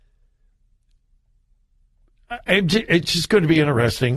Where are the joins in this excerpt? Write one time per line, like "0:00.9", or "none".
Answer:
none

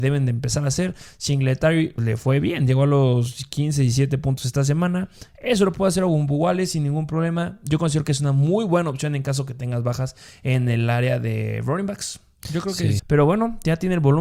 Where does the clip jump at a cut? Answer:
0:02.0
0:13.0

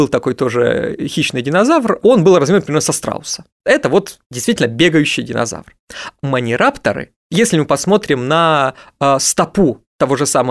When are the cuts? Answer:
0:03.6
0:06.2

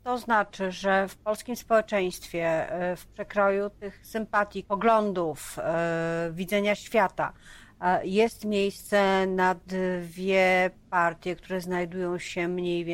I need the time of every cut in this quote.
0:04.6

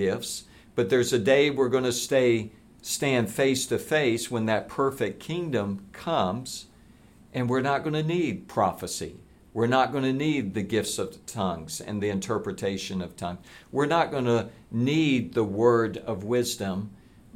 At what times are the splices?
none

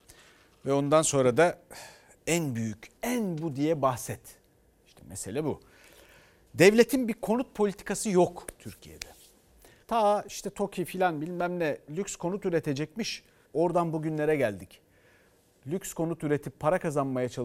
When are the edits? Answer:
0:03.0
0:09.8
0:13.4

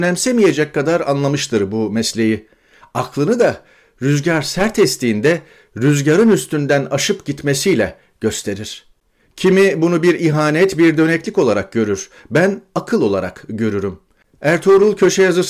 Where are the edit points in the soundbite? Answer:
0:02.8

